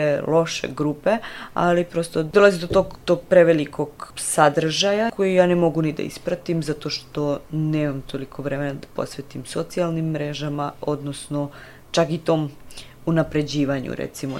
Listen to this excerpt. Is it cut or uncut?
uncut